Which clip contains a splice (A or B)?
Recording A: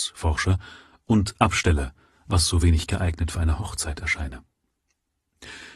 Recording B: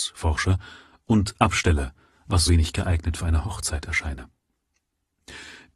B